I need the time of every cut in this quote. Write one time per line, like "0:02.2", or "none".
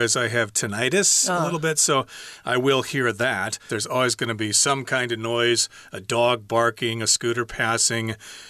0:03.7